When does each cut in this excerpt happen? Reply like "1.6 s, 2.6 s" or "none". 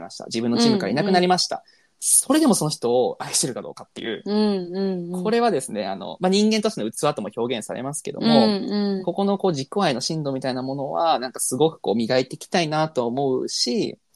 none

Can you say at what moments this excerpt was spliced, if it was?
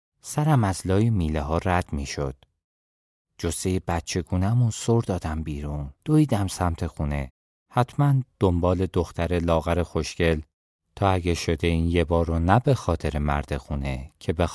6.0 s

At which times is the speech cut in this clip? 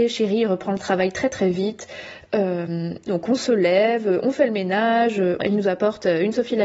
3.1 s, 5.4 s

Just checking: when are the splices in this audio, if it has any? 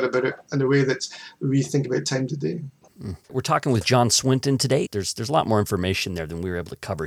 3.2 s, 4.8 s

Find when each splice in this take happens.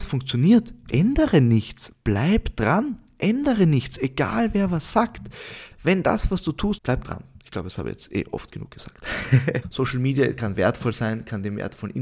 5.7 s, 6.8 s, 9.6 s

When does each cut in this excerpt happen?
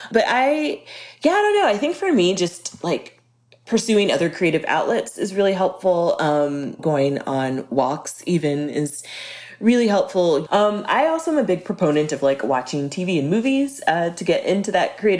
6.8 s, 10.5 s

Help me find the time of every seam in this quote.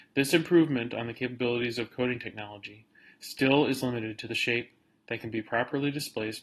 none

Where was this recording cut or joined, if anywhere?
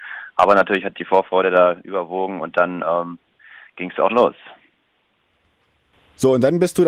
4.1 s

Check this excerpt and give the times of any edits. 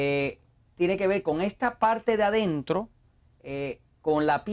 none

